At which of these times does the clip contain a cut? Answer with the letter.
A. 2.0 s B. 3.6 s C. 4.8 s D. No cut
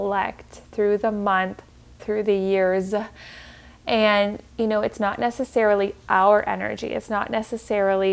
A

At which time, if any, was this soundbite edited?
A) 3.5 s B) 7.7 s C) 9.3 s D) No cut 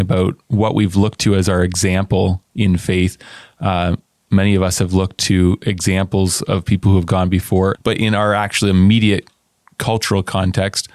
B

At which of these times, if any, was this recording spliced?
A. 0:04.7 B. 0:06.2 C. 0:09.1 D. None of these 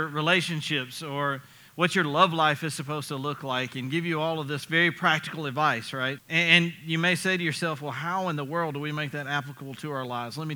B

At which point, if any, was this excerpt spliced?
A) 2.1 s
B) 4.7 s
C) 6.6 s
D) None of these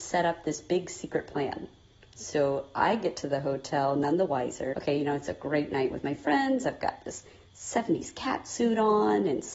B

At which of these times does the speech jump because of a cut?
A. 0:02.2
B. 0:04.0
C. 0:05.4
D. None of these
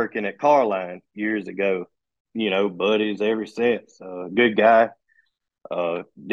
A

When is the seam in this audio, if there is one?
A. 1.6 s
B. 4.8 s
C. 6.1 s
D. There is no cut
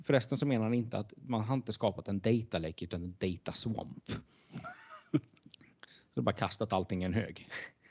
D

